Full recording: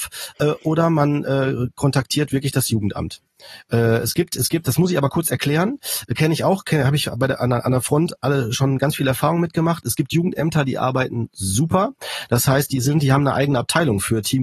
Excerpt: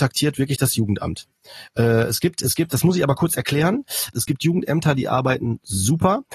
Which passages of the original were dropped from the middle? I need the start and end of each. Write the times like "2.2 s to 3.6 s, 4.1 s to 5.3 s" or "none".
6.1 s to 9.8 s